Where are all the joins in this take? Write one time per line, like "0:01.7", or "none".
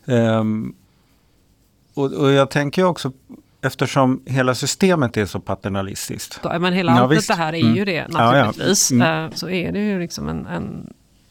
0:06.4
0:09.3